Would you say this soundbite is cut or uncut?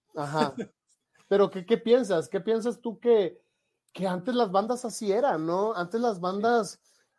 uncut